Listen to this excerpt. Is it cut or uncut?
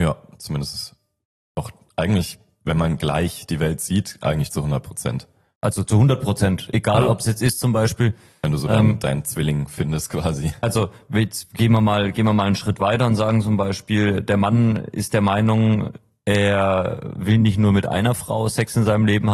uncut